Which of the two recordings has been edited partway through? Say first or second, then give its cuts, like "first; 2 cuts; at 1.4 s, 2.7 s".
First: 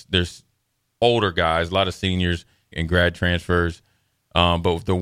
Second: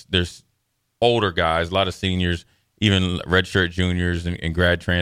first; 1 cut; at 2.7 s